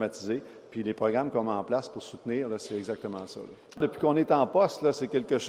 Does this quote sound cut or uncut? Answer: uncut